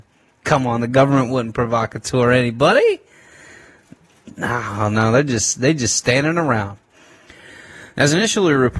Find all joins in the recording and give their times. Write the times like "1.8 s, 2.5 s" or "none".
none